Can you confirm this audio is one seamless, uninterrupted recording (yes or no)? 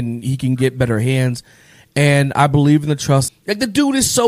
no